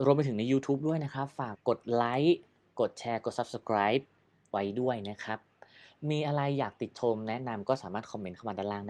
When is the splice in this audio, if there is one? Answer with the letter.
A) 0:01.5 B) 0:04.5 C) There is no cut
A